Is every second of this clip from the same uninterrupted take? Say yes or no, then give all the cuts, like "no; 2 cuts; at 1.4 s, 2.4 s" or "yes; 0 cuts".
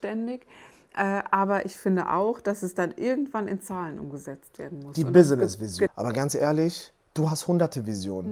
no; 1 cut; at 5.9 s